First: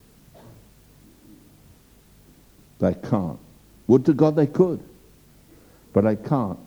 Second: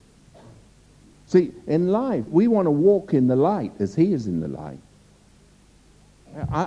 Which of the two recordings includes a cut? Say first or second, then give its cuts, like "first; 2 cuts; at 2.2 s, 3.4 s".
second; 2 cuts; at 1.1 s, 2.3 s